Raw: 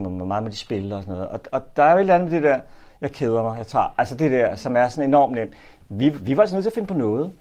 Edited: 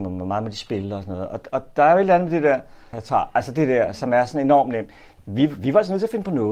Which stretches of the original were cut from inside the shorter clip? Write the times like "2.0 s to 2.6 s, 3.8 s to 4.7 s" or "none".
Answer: 2.9 s to 3.6 s

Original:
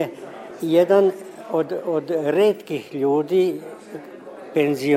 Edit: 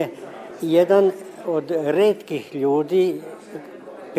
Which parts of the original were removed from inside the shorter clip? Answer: 1.4 s to 1.8 s

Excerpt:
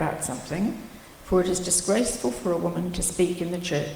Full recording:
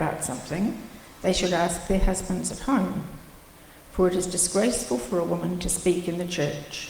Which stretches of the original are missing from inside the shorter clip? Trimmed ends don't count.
1.1 s to 3.8 s

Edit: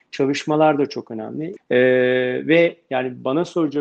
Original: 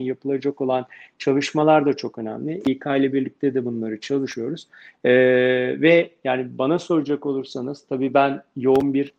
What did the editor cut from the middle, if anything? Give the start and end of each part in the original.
2.6 s to 4.9 s

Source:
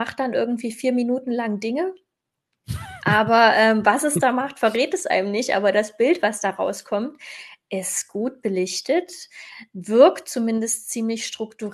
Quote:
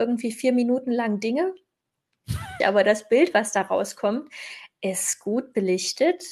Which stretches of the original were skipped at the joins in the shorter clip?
3.0 s to 5.5 s

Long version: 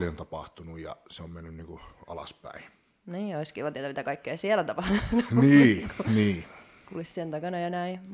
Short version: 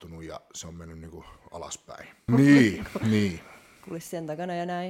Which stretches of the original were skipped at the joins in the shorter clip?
2.8 s to 5.3 s

